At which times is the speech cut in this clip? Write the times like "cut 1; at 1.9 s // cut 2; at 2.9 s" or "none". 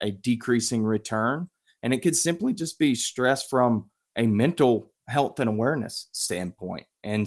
none